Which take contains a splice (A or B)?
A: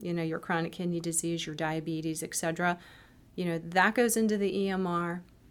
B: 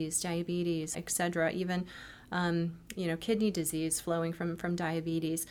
B